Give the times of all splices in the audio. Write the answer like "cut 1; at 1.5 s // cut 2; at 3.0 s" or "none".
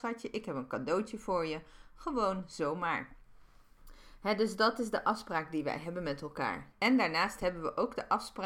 cut 1; at 6.7 s